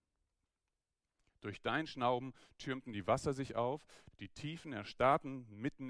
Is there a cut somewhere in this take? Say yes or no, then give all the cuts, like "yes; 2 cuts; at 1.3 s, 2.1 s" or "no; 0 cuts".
yes; 1 cut; at 4.1 s